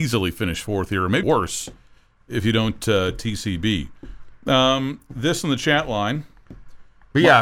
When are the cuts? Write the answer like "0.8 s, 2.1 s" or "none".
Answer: 1.2 s